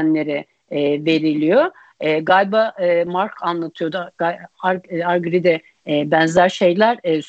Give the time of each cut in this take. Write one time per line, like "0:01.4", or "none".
none